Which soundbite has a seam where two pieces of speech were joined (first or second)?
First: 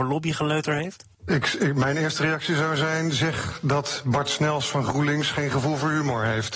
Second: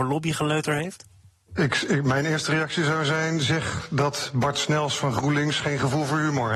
first